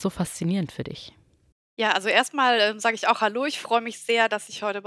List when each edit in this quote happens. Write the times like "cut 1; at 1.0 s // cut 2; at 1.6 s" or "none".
none